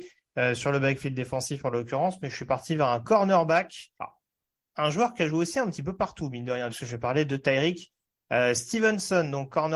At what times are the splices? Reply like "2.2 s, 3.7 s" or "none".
3.9 s, 6.7 s